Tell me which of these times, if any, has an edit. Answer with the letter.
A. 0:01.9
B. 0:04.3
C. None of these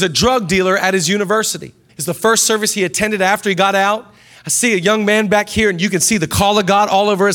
A